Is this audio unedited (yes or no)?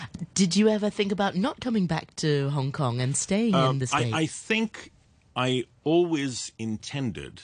yes